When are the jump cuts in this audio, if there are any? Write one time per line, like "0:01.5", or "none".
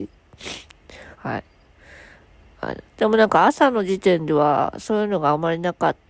0:01.1
0:02.8